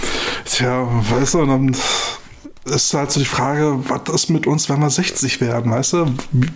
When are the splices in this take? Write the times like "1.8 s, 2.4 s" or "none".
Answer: none